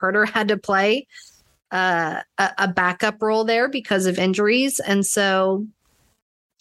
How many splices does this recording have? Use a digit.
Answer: 0